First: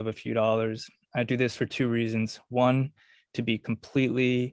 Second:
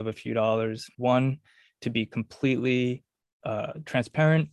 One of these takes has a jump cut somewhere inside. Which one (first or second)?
second